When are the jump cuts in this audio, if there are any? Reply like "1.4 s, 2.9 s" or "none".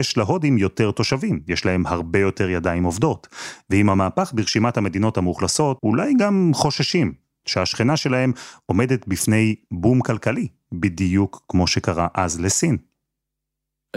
5.8 s

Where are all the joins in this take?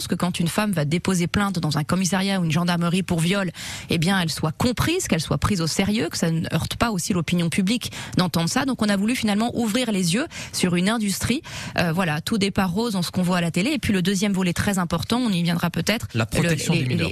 16.1 s

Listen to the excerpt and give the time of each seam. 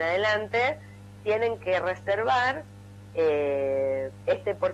none

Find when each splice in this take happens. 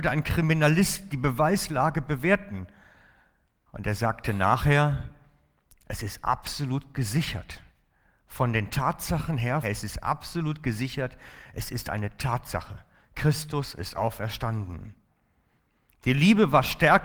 9.6 s

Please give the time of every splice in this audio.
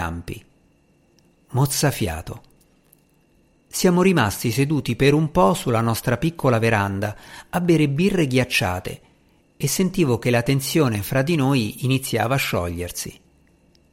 none

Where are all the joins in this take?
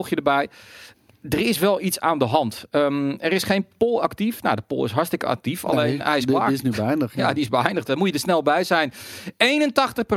7.8 s

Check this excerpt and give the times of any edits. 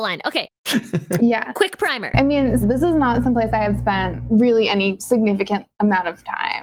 1.2 s, 2.6 s

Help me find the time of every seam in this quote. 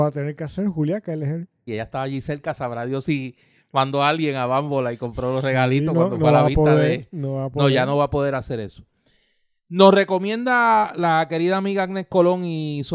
1.7 s

